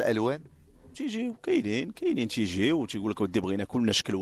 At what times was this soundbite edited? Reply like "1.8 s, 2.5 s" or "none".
0.9 s